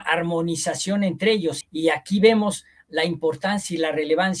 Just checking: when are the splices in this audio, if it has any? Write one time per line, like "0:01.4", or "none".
0:01.6

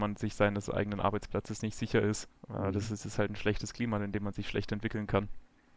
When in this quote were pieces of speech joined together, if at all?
0:02.4

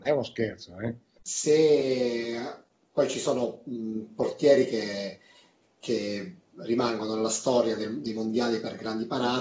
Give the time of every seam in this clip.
0:01.2

